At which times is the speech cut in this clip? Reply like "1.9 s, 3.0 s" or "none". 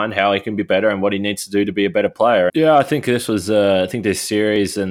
2.5 s